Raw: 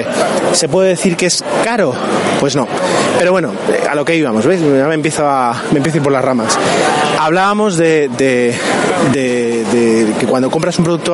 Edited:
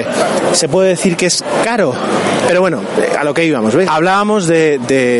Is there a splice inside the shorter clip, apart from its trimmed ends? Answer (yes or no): yes